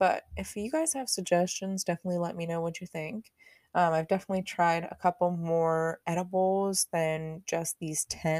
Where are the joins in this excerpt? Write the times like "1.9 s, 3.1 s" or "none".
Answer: none